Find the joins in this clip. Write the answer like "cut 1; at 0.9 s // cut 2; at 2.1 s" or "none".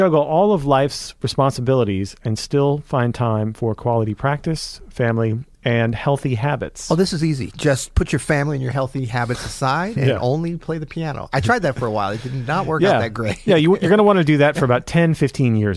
none